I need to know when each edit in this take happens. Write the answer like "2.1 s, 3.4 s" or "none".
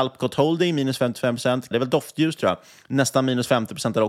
1.7 s